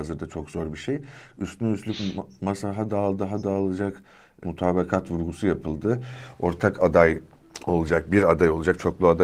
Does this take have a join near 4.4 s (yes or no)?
yes